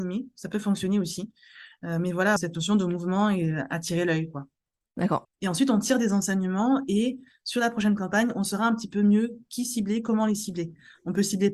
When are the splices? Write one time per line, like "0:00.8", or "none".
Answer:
0:02.4
0:05.2